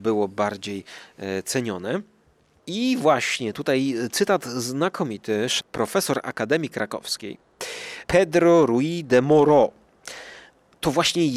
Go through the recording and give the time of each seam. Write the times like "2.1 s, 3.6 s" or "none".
2.6 s, 5.6 s